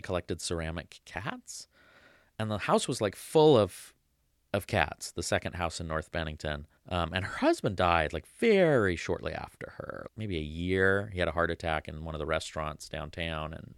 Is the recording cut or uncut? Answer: cut